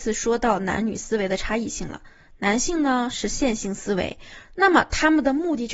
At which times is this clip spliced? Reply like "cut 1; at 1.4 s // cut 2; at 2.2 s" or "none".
cut 1; at 4.4 s